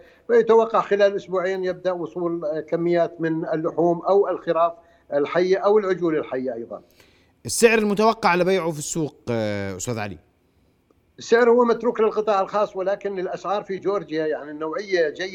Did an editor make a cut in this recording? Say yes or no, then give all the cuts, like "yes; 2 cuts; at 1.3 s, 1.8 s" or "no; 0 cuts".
no; 0 cuts